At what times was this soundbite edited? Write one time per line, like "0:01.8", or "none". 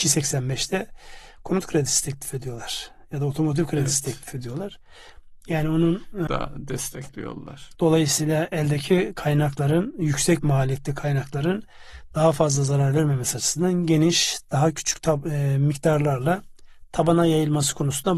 0:06.3
0:07.7